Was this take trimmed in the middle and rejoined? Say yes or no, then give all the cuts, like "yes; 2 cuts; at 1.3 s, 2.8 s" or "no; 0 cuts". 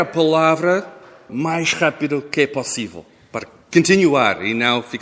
yes; 1 cut; at 1.3 s